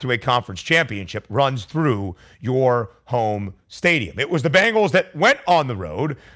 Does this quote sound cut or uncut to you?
uncut